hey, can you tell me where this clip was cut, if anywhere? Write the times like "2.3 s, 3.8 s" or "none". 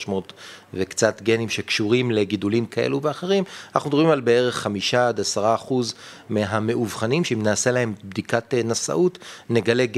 none